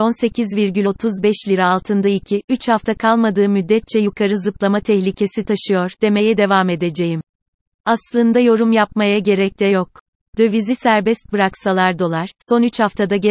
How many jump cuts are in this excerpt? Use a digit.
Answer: 1